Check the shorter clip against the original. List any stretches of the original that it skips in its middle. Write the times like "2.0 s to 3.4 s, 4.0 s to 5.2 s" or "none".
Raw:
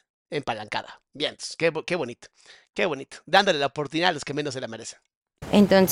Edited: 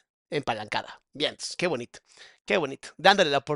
1.6 s to 1.8 s